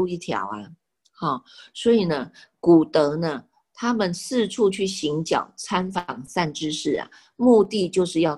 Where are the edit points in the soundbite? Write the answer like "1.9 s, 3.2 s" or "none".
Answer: none